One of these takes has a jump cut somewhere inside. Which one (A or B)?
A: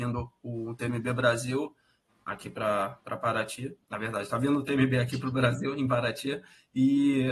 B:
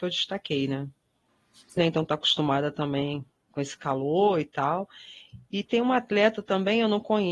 B